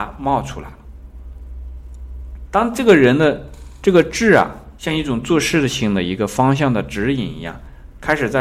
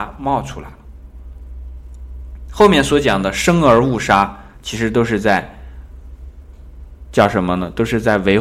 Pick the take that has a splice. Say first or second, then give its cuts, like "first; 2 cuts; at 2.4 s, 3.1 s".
first; 2 cuts; at 2.5 s, 4.8 s